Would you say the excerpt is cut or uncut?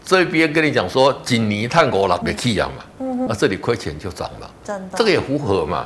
cut